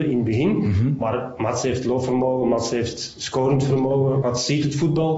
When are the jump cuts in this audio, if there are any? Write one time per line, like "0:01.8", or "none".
0:04.2